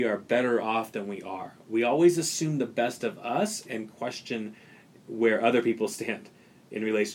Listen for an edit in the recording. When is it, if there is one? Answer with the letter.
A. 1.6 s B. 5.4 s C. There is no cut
C